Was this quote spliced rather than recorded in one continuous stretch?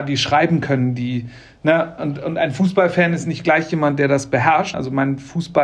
yes; 1 cut; at 4.7 s

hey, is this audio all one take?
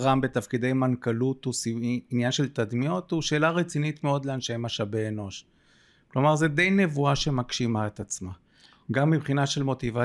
yes; 0 cuts

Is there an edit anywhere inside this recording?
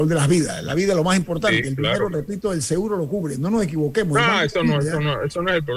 no; 0 cuts

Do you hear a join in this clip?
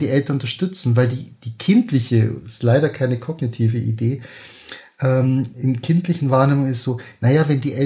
no; 0 cuts

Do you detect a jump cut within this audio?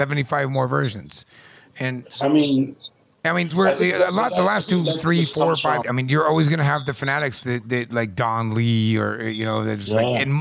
yes; 2 cuts; at 3.5 s, 5.8 s

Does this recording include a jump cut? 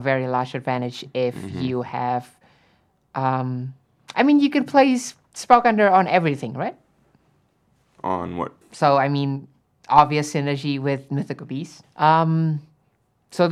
yes; 2 cuts; at 8.6 s, 11.8 s

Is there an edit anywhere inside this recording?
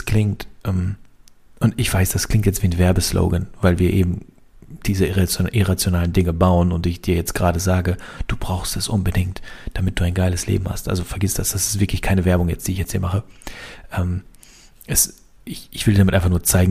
no; 0 cuts

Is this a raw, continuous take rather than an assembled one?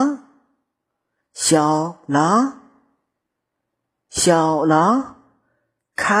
yes; 0 cuts

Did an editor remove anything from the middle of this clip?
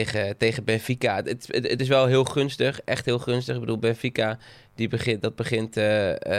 no; 0 cuts

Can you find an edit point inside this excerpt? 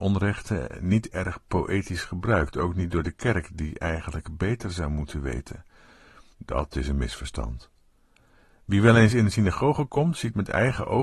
yes; 1 cut; at 6.3 s

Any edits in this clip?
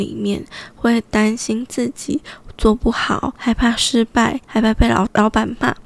no; 0 cuts

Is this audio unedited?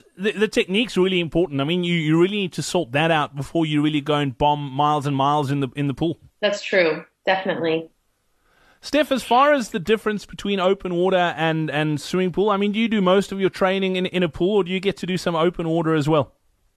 no; 1 cut; at 6.3 s

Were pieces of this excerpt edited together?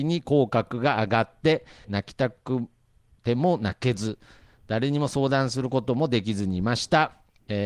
yes; 1 cut; at 1.8 s

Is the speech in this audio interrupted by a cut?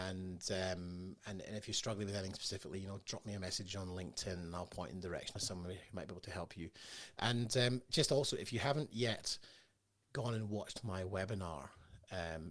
no; 0 cuts

